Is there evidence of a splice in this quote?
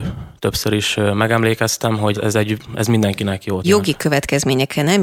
yes; 2 cuts; at 2.1 s, 3.6 s

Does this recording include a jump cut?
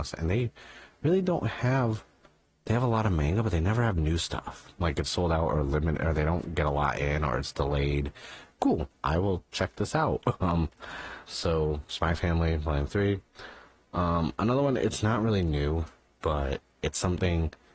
yes; 3 cuts; at 5.0 s, 8.5 s, 11.3 s

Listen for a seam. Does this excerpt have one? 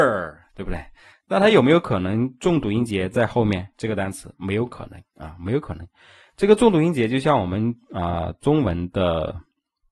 no; 0 cuts

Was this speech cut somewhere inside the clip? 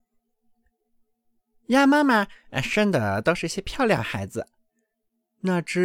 no; 0 cuts

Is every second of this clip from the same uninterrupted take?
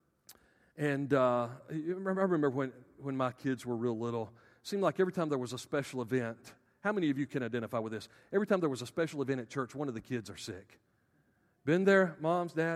yes; 0 cuts

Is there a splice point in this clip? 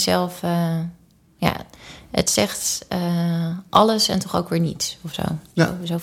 no; 0 cuts

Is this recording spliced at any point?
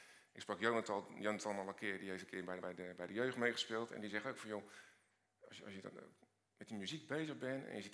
no; 0 cuts

